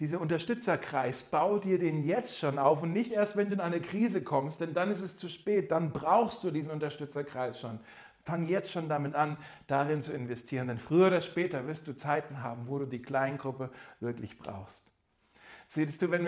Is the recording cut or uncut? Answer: uncut